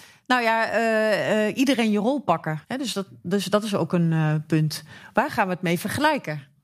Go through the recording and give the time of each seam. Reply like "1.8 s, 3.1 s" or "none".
2.6 s